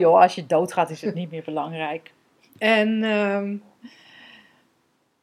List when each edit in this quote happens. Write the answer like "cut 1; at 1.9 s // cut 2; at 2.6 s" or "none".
none